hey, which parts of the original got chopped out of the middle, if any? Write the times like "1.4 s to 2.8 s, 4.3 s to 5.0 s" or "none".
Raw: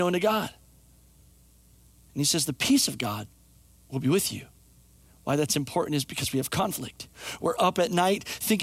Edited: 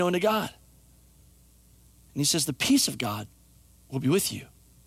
none